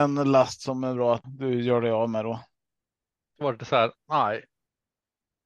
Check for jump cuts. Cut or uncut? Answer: cut